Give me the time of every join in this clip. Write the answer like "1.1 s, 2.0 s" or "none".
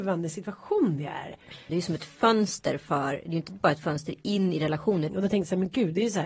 1.7 s, 5.1 s

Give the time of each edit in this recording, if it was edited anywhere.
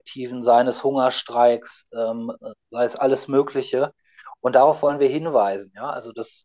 none

